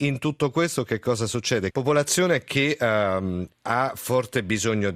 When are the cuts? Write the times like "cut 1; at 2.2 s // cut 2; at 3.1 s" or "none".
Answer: cut 1; at 1.7 s // cut 2; at 3.5 s